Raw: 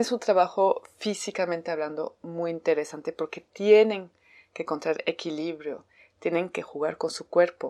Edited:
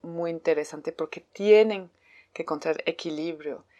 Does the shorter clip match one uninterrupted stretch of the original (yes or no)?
yes